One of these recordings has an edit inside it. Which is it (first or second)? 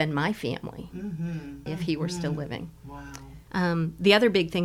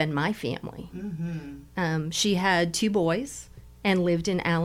first